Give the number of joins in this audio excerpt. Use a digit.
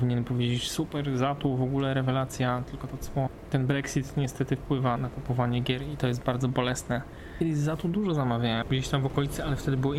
2